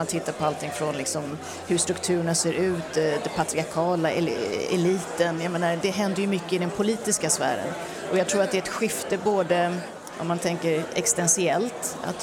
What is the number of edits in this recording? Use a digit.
1